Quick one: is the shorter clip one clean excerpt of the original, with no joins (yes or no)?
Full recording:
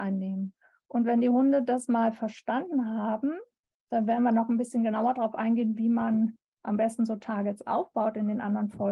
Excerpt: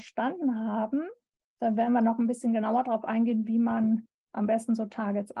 yes